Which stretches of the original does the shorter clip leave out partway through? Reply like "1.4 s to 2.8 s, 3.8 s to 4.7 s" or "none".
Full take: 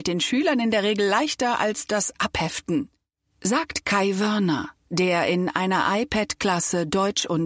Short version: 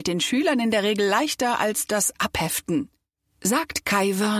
none